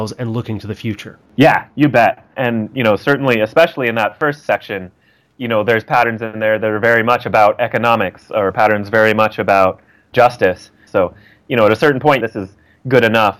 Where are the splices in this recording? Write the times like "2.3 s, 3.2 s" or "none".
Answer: 10.9 s, 12.2 s

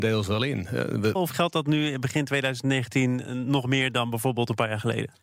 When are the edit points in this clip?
1.2 s

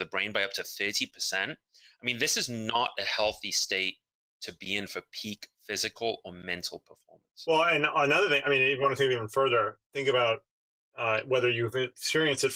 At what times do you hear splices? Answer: none

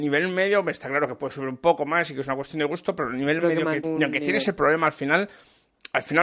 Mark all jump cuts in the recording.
3.8 s

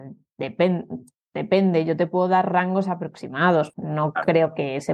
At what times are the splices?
3.7 s

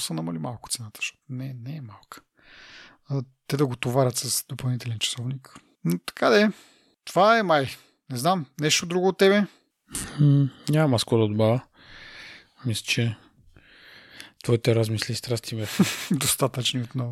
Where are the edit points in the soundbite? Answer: none

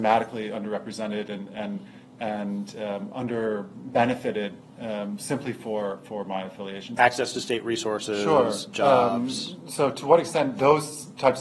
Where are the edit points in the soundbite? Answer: 7.0 s

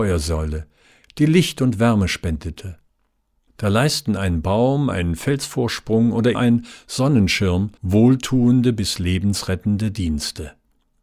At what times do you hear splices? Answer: 3.5 s, 6.3 s, 7.8 s

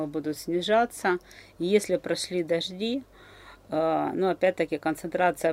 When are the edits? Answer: none

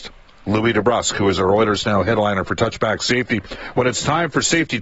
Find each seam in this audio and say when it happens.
none

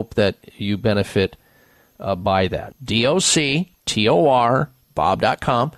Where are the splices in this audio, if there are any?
2.7 s, 3.8 s

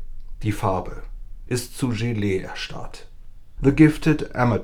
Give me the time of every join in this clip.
1.5 s, 3.6 s

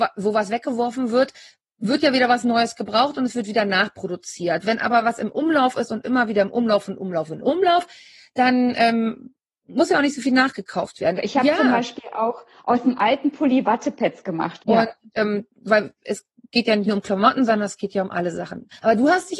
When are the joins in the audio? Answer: 11.1 s, 14.6 s

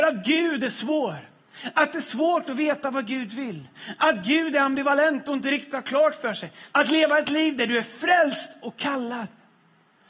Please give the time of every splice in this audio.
6.7 s

